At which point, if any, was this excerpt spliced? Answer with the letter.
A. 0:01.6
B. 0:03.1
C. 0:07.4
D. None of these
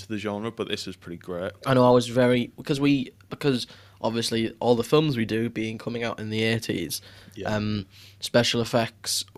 A